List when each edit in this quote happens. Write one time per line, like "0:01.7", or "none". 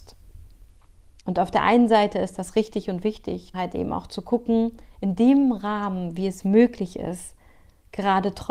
0:01.2
0:03.5